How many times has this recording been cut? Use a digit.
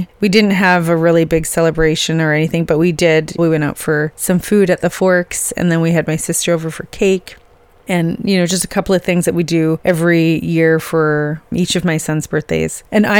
2